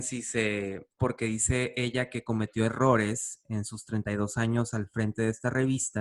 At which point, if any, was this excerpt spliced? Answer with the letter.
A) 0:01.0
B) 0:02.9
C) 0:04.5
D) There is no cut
A